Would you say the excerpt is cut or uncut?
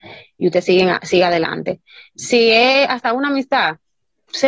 uncut